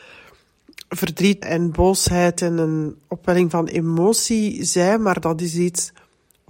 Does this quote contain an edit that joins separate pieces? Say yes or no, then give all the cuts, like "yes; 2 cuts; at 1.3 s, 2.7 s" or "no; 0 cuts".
yes; 1 cut; at 1.4 s